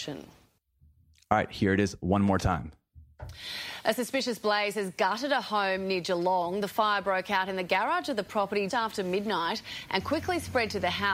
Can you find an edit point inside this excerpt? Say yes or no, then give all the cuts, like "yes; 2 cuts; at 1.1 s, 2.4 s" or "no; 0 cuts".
yes; 2 cuts; at 6.6 s, 8.7 s